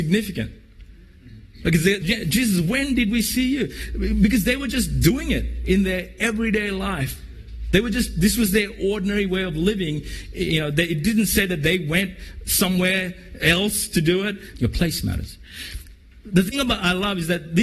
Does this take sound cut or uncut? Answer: cut